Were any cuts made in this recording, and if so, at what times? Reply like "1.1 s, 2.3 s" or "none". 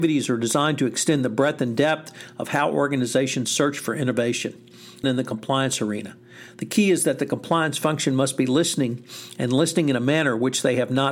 5.0 s